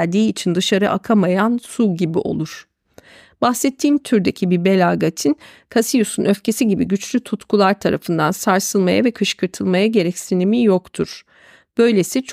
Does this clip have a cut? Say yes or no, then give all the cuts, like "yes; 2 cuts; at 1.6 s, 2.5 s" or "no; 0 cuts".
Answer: no; 0 cuts